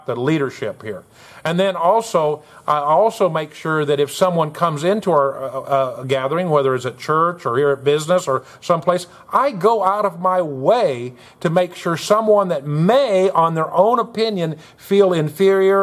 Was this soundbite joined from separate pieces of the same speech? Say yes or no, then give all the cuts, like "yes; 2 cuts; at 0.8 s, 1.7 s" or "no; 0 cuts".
no; 0 cuts